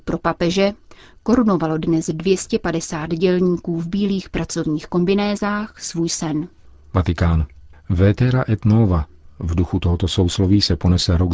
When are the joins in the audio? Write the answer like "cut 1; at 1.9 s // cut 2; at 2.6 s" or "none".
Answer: none